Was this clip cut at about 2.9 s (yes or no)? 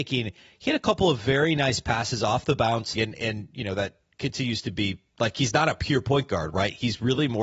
yes